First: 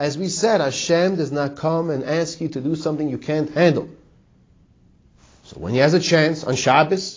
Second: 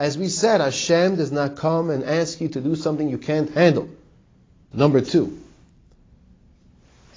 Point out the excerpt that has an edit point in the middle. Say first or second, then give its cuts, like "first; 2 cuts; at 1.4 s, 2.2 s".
second; 1 cut; at 4.7 s